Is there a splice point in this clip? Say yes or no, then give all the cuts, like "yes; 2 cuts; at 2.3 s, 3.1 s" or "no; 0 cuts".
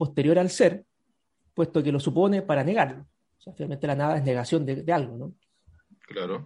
no; 0 cuts